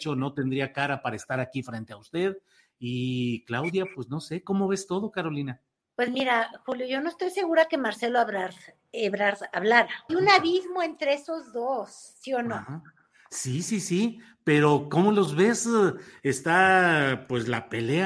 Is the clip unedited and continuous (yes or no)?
no